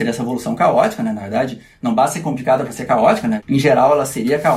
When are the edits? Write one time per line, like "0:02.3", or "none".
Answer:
none